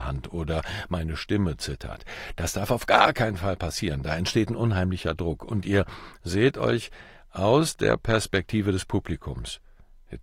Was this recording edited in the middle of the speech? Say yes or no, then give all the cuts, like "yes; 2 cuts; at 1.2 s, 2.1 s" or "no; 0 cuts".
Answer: no; 0 cuts